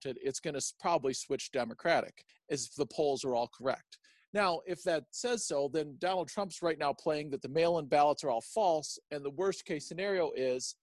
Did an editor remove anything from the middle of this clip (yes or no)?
no